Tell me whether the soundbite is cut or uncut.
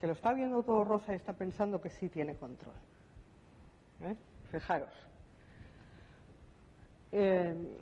uncut